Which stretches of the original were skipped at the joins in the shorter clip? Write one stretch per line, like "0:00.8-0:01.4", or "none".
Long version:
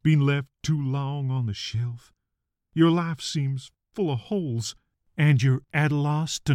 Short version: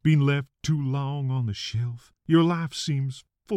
0:02.2-0:02.6